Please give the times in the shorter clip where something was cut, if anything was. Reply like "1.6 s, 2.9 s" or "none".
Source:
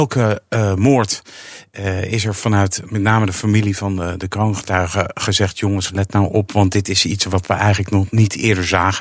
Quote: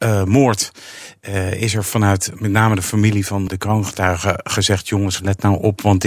3.5 s